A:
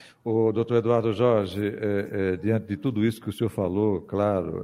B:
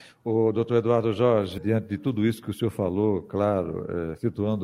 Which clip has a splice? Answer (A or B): B